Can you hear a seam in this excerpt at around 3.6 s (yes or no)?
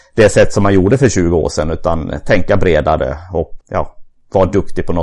yes